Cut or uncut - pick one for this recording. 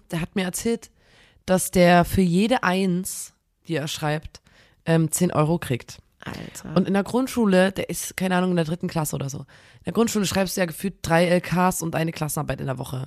uncut